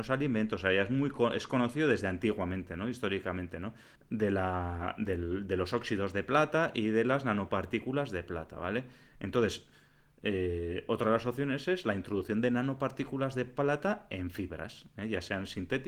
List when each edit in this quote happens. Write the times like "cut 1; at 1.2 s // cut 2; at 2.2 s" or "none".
cut 1; at 4.0 s // cut 2; at 9.2 s